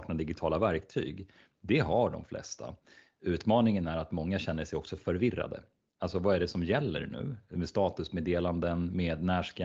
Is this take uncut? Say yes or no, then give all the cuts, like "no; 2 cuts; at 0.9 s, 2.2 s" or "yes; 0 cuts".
yes; 0 cuts